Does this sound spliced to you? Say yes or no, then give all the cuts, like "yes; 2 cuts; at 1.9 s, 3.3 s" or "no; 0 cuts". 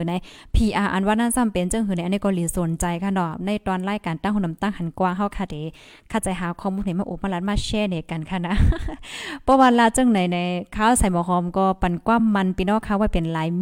no; 0 cuts